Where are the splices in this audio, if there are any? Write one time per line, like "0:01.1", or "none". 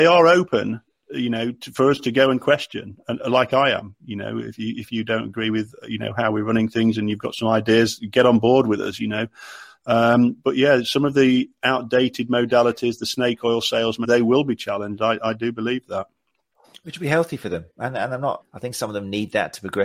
0:14.0
0:18.4